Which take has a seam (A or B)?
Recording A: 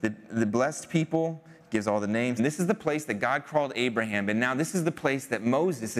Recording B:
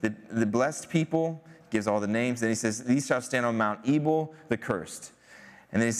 A